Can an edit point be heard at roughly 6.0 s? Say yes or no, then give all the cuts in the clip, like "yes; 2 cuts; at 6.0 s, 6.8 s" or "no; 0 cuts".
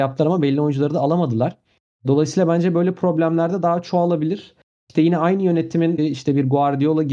yes; 1 cut; at 6.0 s